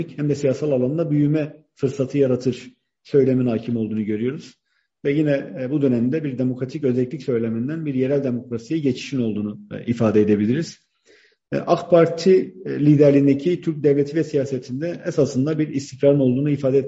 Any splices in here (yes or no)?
no